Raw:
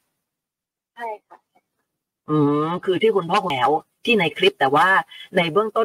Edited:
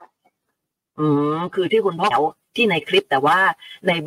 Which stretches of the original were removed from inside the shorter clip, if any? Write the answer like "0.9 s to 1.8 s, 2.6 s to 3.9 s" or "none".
3.4 s to 3.6 s